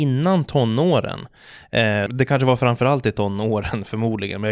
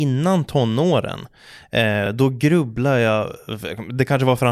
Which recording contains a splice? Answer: first; 1 cut; at 2.1 s

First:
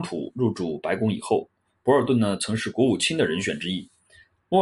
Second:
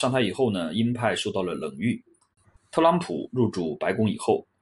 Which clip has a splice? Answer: second; 1 cut; at 2.6 s

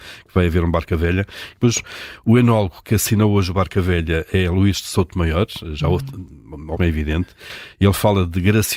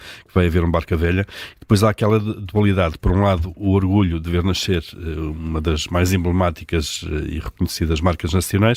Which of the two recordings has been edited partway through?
first; 2 cuts; at 1.5 s, 6.7 s

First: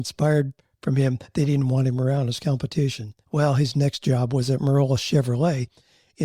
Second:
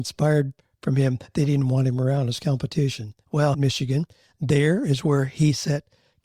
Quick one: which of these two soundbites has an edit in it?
second; 1 cut; at 3.5 s

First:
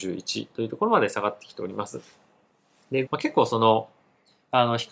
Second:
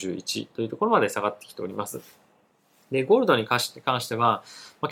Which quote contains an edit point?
first; 1 cut; at 3.1 s

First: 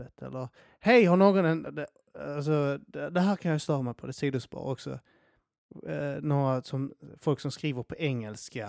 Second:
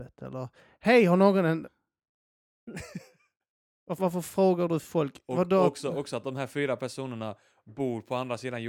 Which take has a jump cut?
second; 2 cuts; at 1.6 s, 4.0 s

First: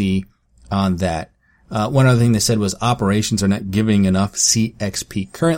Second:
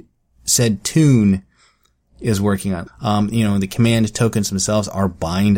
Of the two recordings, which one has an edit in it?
second; 1 cut; at 2.9 s

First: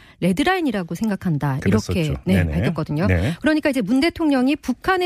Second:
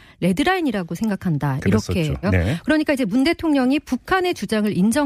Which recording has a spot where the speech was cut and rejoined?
second; 1 cut; at 2.2 s

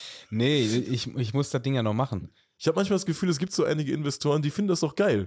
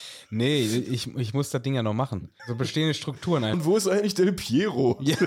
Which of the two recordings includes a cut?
second; 2 cuts; at 2.4 s, 3.5 s

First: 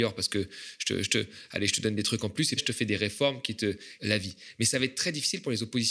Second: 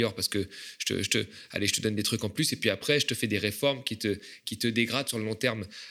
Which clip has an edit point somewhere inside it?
first; 2 cuts; at 2.6 s, 4.0 s

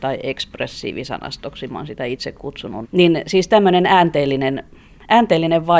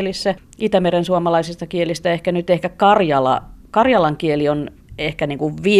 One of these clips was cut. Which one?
first; 1 cut; at 2.8 s

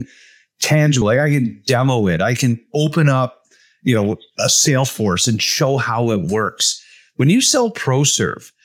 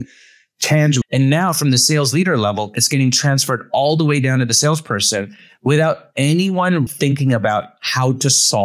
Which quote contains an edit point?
second; 2 cuts; at 1.0 s, 6.9 s

